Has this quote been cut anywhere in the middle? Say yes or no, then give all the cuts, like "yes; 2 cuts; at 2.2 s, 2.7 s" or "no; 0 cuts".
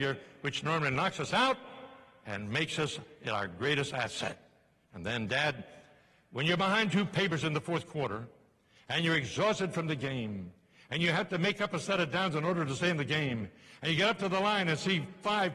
no; 0 cuts